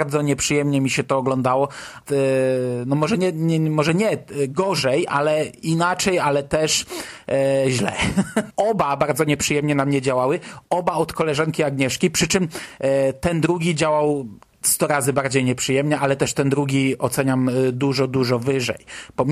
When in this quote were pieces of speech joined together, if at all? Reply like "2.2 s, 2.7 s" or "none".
2.1 s, 8.5 s